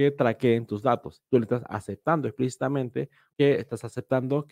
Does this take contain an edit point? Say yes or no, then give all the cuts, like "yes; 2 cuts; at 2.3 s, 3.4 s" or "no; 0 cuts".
yes; 2 cuts; at 1.3 s, 3.3 s